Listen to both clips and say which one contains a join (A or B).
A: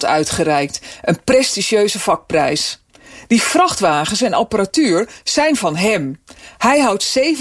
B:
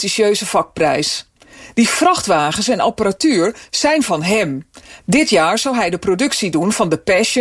B